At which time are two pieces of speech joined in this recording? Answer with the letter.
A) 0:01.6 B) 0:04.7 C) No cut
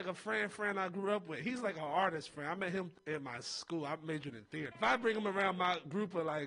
B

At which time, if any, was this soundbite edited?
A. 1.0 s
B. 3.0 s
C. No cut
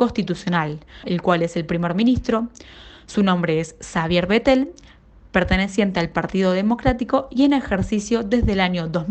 A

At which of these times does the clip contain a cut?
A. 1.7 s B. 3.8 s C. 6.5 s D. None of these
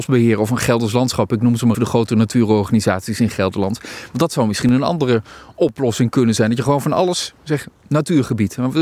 A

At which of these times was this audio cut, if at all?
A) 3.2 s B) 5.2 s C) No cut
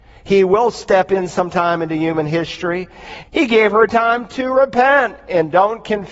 A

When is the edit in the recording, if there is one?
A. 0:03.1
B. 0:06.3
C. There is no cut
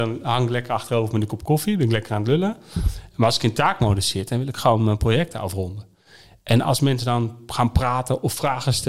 C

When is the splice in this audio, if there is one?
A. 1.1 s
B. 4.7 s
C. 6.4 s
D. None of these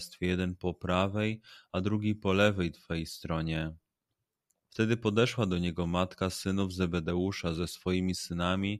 B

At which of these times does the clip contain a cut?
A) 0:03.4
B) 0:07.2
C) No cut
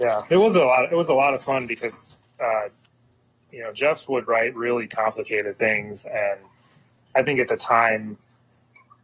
C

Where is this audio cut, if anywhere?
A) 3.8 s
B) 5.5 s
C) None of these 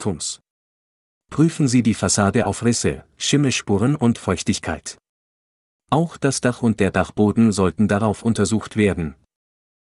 C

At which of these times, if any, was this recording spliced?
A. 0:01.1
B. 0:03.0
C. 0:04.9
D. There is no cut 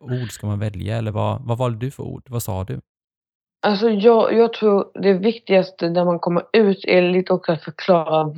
D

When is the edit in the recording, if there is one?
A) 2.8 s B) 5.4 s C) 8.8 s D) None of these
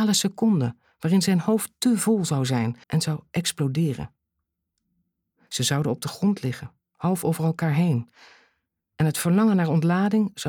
A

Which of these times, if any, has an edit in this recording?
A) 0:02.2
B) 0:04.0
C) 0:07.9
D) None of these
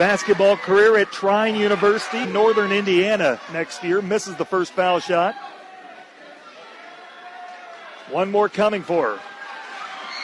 A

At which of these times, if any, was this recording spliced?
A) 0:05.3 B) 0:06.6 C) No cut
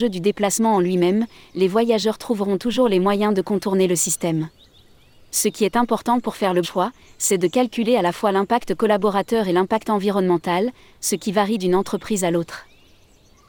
B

